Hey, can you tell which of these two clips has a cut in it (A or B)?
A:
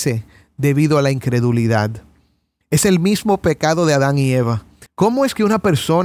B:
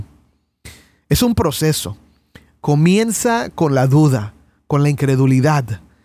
A